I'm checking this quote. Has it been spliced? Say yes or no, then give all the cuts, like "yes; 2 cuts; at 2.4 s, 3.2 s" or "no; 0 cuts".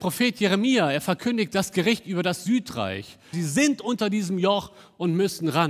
yes; 1 cut; at 3.3 s